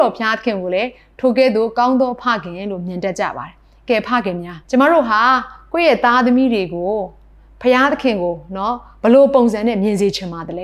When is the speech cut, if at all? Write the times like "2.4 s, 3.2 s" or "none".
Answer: 4.6 s

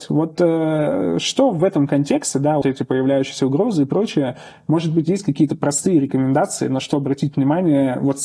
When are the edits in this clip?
2.6 s

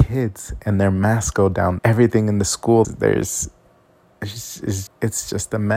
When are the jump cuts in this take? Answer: 1.8 s, 2.8 s, 4.9 s

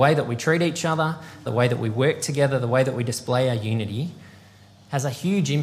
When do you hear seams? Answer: 1.5 s

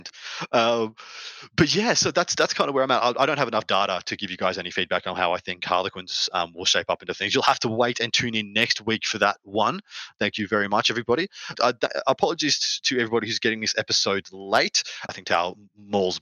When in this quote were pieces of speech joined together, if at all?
11.5 s, 15.1 s

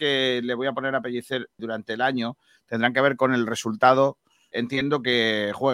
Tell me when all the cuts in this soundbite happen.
1.6 s, 4.5 s

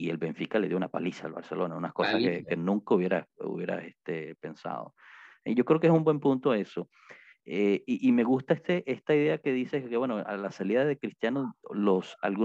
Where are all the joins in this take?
none

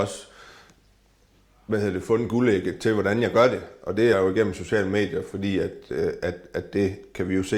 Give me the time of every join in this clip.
4.1 s

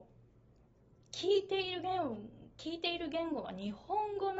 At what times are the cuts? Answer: 2.5 s

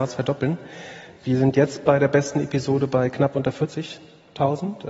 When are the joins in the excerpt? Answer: none

